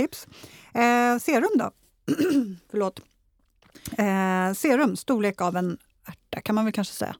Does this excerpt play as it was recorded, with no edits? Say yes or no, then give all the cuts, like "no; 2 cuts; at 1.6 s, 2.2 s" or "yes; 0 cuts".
yes; 0 cuts